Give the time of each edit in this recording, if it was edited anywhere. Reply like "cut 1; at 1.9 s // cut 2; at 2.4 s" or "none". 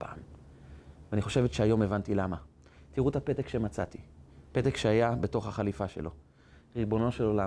none